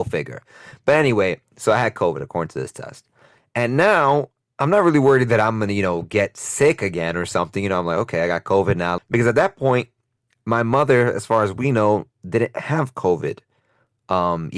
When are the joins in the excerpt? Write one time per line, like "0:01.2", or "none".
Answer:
0:09.0

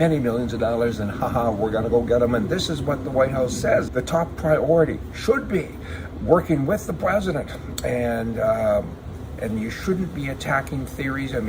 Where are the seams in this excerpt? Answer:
0:03.9
0:09.4

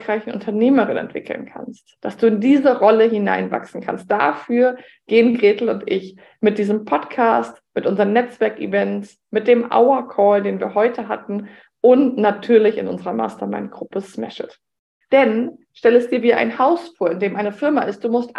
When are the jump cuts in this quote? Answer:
0:15.0

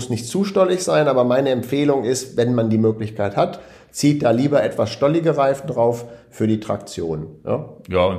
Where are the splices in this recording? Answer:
none

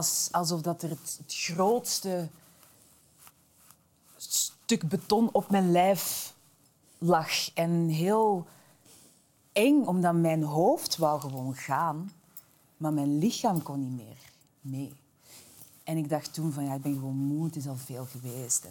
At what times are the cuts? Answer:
none

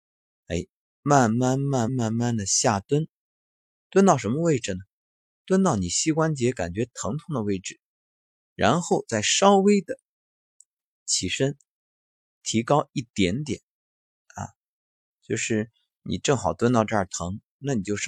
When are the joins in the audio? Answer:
0:01.9

